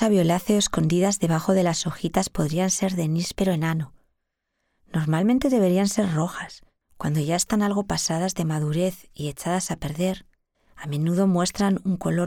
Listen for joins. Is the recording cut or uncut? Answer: cut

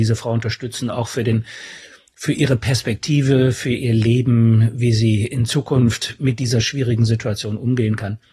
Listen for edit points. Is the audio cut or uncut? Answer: uncut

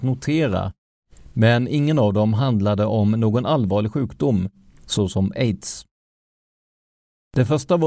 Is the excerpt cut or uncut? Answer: uncut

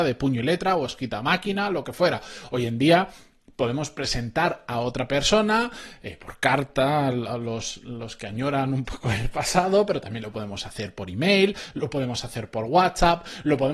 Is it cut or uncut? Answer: uncut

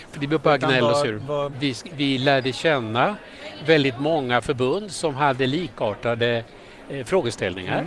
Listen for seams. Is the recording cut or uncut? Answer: cut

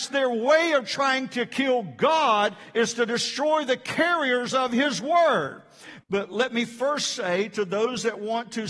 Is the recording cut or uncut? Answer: cut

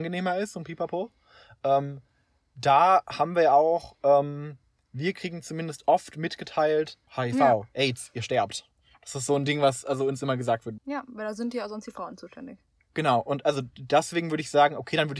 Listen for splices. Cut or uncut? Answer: cut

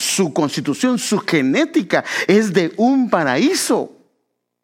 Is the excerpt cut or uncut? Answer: uncut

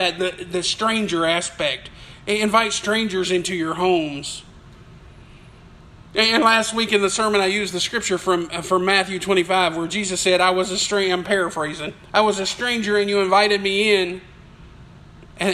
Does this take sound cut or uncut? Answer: cut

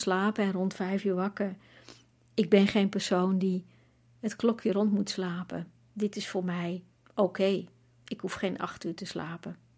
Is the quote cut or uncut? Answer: uncut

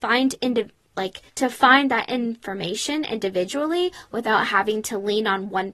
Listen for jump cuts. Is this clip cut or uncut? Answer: cut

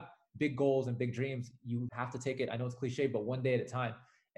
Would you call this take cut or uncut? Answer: cut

